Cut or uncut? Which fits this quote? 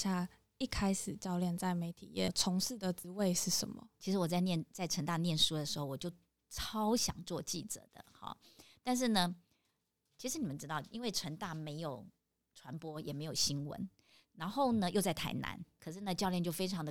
cut